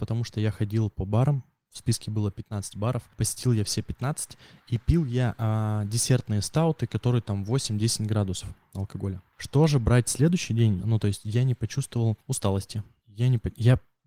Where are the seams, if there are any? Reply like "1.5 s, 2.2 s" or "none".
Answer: 10.8 s